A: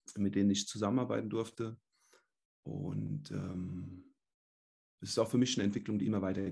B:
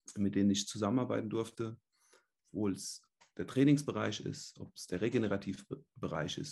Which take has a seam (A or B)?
B